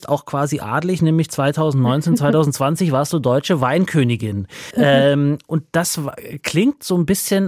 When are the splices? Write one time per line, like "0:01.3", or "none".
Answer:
0:04.7